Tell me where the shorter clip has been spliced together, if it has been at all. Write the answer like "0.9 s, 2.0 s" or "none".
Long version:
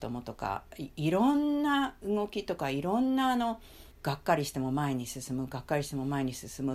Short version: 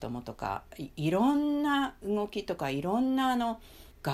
none